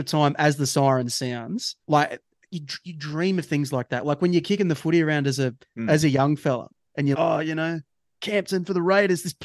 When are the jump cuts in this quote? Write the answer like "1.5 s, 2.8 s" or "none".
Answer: 1.8 s, 7.1 s